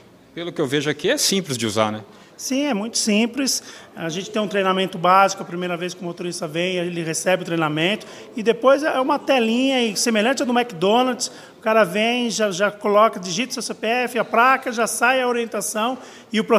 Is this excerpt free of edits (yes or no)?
yes